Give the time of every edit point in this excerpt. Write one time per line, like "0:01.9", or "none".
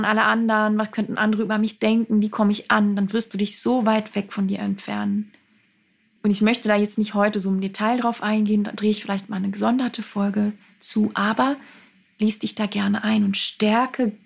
0:06.2